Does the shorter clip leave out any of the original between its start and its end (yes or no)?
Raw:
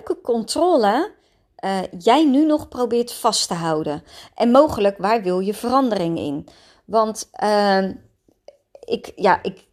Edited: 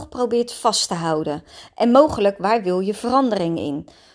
no